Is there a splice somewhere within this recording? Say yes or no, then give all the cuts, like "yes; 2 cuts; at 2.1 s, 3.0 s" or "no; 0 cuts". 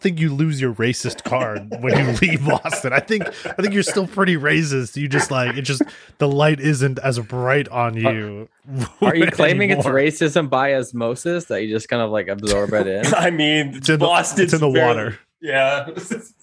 no; 0 cuts